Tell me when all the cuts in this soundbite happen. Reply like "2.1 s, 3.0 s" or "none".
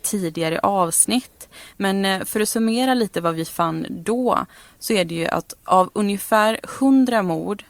none